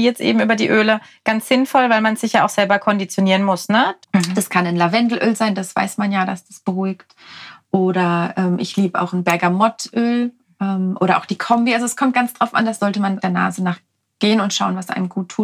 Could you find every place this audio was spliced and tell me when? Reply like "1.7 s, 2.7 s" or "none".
4.0 s, 13.2 s